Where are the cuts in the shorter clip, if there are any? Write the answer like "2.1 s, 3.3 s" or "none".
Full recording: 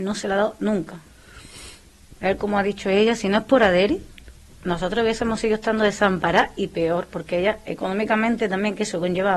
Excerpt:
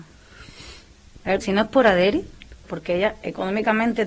1.4 s, 2.6 s